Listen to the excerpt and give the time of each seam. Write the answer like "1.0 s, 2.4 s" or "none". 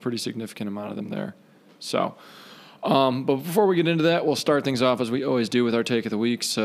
none

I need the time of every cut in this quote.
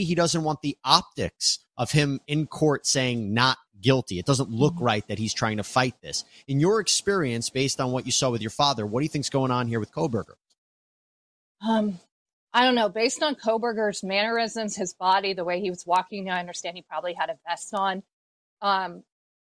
none

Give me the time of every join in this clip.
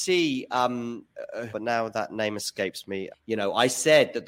1.5 s, 3.1 s

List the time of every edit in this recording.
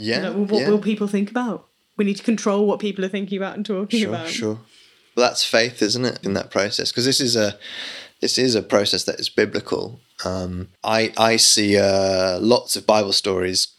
6.2 s, 10.8 s

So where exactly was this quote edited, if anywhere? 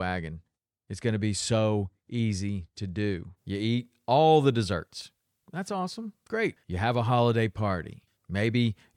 3.4 s, 6.6 s

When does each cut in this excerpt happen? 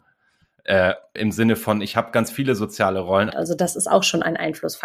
1.2 s, 3.3 s

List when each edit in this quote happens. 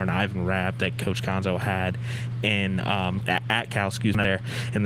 3.2 s

